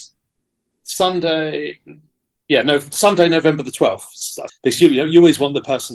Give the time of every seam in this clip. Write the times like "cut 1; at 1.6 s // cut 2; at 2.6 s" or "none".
cut 1; at 4.5 s